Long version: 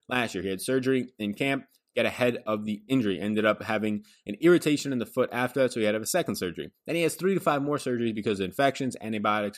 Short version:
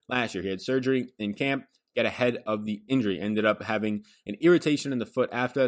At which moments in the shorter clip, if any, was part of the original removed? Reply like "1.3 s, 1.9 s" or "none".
none